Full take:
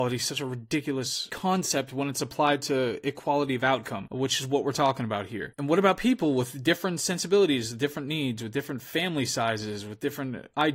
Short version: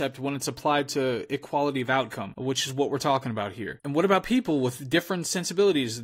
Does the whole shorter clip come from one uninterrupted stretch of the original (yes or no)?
yes